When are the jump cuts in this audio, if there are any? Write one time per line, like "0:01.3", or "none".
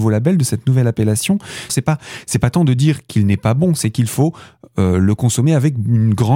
0:01.7

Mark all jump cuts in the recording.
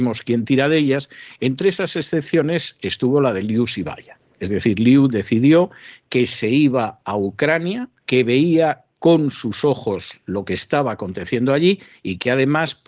0:08.0

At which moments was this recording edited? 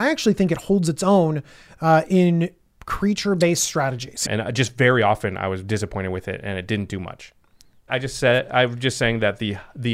0:04.2
0:07.9

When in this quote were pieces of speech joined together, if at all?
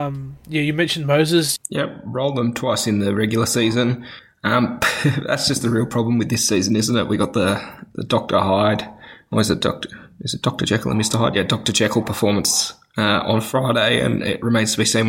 0:01.6

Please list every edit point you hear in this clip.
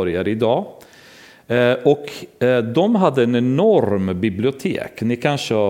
none

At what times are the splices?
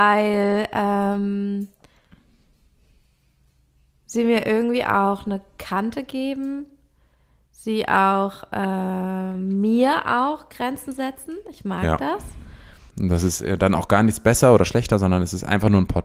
0:12.9

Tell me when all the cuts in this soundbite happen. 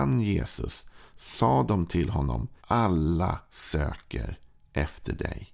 0:02.6

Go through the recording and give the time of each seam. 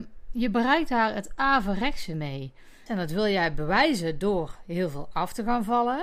0:02.9

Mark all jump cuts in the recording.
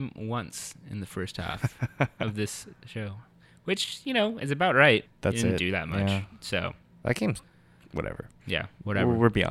0:05.1

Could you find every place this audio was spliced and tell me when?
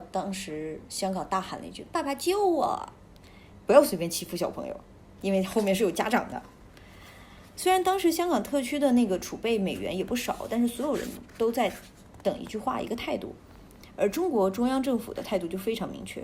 none

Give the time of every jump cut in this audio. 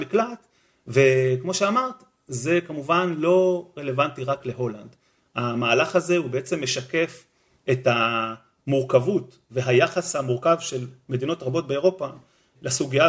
none

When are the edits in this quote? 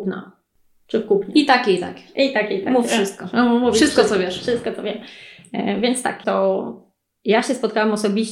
0:06.2

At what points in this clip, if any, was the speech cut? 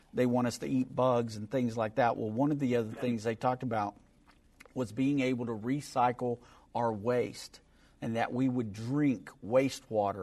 none

